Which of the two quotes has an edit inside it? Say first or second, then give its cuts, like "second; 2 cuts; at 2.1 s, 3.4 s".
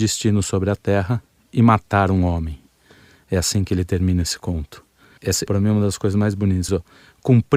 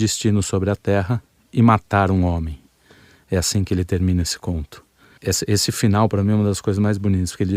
first; 2 cuts; at 5.5 s, 6.7 s